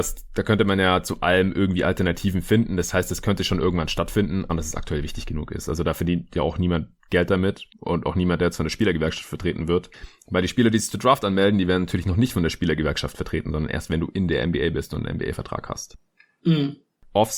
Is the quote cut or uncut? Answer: cut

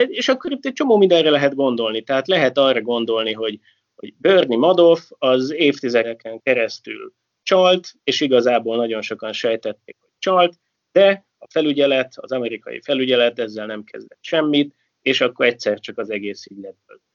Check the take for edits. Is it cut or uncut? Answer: uncut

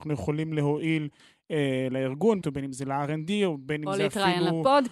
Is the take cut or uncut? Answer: cut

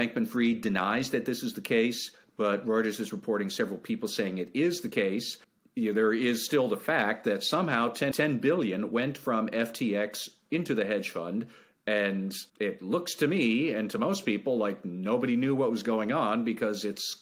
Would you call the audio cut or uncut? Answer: cut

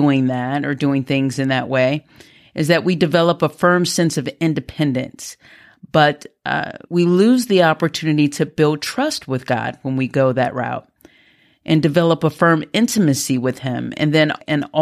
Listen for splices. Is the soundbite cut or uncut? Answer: cut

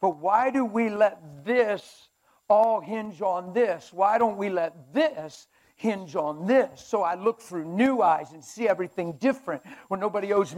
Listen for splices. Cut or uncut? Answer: uncut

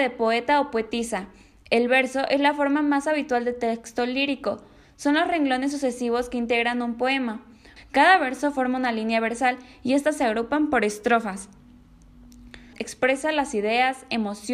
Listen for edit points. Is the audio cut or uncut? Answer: cut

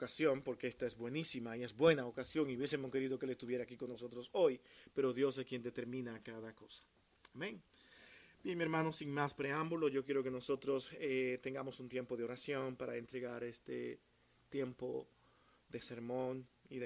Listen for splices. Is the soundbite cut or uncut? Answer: uncut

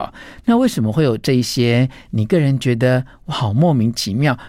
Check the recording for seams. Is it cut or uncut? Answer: uncut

